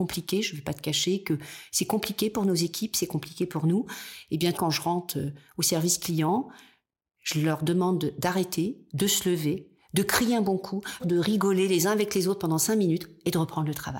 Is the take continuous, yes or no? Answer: no